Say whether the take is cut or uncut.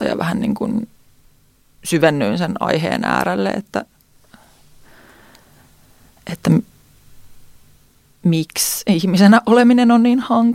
uncut